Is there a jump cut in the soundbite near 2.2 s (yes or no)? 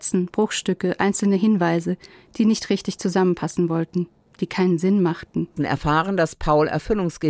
no